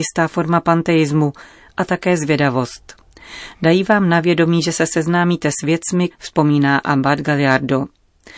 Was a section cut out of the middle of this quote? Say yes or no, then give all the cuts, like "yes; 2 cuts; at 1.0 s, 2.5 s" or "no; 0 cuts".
yes; 1 cut; at 6.1 s